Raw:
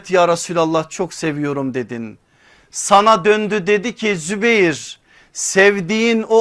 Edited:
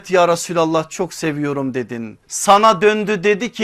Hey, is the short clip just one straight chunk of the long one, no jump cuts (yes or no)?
no